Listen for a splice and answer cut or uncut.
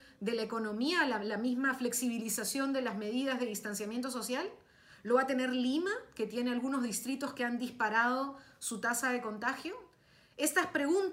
uncut